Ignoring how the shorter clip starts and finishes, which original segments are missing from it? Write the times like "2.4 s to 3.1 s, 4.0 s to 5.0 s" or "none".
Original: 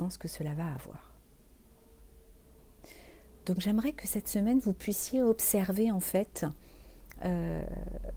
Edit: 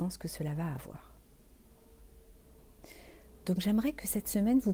none